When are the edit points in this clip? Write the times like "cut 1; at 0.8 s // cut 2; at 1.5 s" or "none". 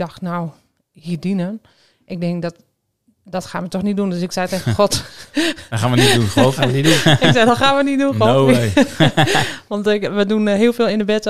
none